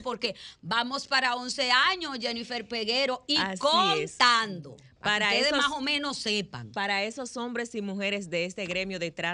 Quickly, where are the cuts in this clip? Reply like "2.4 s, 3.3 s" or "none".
none

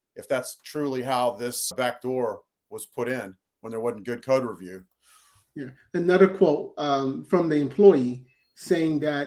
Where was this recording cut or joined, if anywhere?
1.7 s

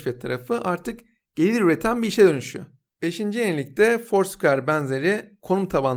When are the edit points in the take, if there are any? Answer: 2.9 s

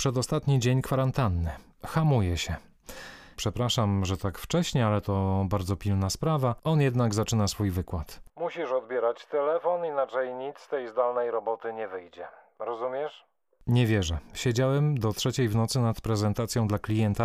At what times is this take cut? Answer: 3.4 s

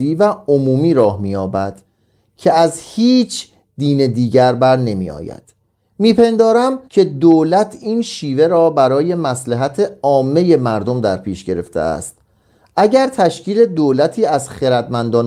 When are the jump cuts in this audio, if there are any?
6.8 s

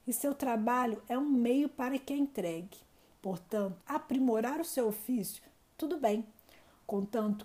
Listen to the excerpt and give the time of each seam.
3.8 s

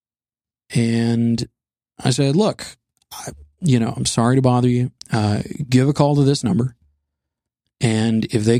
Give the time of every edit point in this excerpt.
5.0 s

